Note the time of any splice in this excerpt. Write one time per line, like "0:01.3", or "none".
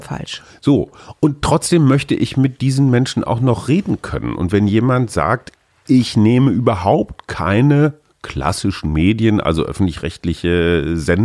none